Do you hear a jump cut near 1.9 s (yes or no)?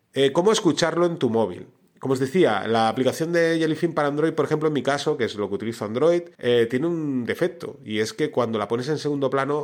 no